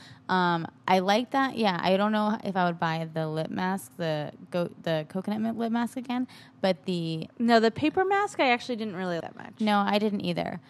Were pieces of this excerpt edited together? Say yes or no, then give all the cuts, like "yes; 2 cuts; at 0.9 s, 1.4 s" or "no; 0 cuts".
yes; 1 cut; at 9.2 s